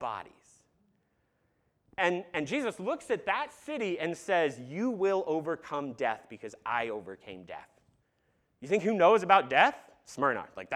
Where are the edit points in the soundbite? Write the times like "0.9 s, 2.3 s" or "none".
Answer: none